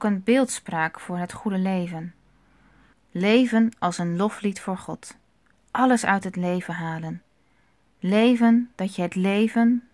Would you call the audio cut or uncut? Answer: uncut